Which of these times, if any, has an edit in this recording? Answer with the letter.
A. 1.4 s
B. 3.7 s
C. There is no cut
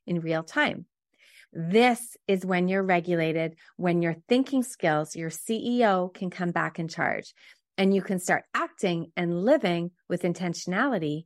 A